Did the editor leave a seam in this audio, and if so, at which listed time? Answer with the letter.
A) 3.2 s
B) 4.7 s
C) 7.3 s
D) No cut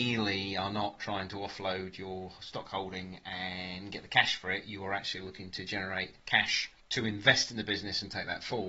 D